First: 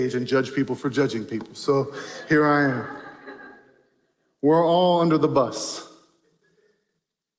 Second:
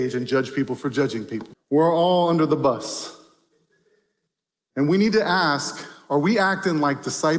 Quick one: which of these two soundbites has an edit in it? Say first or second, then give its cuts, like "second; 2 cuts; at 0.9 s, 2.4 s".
second; 1 cut; at 1.5 s